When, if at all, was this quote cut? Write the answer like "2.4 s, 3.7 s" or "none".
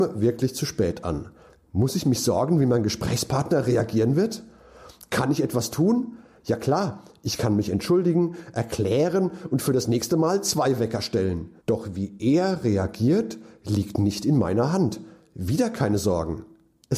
11.6 s